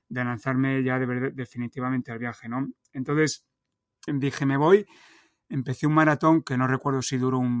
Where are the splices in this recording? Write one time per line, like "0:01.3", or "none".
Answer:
0:04.1